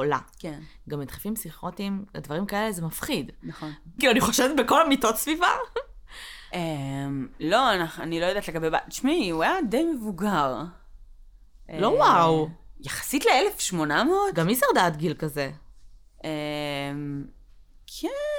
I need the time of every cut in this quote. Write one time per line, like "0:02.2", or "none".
0:04.0